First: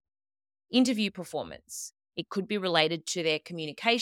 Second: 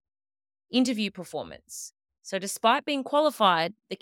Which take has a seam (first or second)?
first